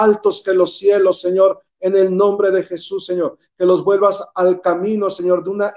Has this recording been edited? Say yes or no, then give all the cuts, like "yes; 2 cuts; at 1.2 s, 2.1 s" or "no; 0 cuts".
yes; 1 cut; at 3.5 s